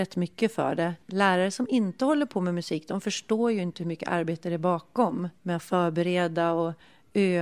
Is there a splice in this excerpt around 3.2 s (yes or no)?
no